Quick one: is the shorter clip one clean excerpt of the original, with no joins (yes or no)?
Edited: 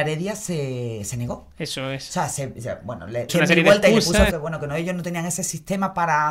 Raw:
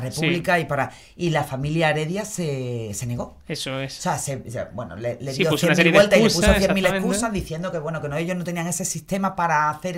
no